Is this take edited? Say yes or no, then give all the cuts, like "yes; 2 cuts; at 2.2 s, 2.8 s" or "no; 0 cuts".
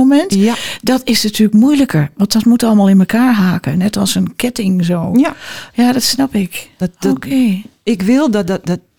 no; 0 cuts